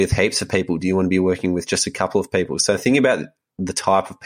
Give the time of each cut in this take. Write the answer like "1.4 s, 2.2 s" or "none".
none